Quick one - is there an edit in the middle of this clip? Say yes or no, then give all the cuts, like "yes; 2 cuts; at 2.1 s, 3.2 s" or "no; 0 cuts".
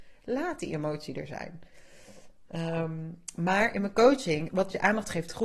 no; 0 cuts